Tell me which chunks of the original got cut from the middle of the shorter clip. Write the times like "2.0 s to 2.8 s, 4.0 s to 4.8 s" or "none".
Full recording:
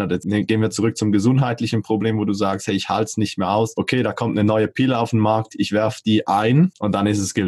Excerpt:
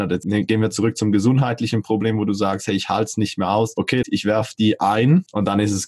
4.0 s to 5.5 s